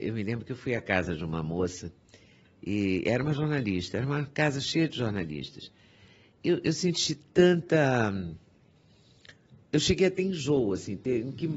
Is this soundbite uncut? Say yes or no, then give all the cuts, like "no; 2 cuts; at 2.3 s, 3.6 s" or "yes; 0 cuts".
yes; 0 cuts